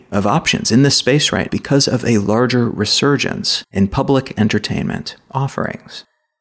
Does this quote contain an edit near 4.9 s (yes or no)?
no